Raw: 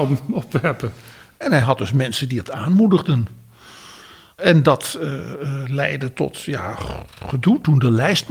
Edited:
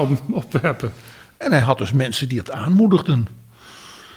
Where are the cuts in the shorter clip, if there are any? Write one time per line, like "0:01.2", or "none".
none